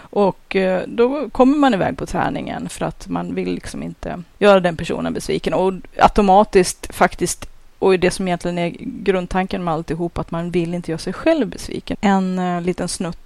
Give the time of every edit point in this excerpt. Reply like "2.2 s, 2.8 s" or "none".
11.9 s